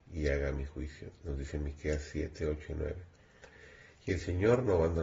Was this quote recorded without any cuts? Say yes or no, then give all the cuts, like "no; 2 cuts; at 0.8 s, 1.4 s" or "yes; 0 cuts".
yes; 0 cuts